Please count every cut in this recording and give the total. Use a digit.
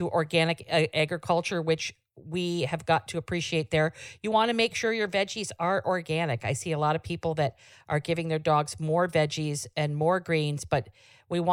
0